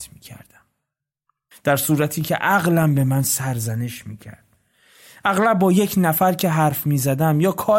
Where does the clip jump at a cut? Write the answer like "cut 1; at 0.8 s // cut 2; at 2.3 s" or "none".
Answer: cut 1; at 1.5 s